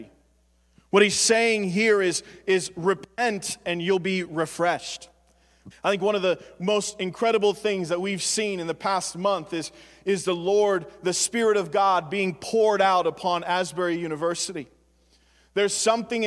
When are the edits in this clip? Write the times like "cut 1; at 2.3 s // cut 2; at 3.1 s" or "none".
cut 1; at 5.7 s